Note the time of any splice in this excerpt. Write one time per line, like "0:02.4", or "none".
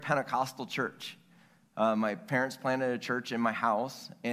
none